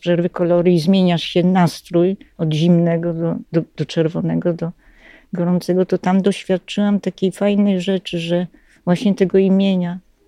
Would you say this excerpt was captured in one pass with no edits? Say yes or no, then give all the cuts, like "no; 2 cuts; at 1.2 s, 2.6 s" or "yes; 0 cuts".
yes; 0 cuts